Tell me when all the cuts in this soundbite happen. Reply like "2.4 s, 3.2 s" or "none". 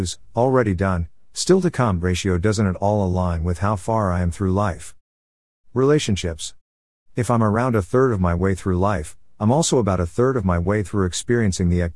6.9 s